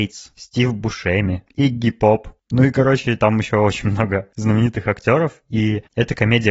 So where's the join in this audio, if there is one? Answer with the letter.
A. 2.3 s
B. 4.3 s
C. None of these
C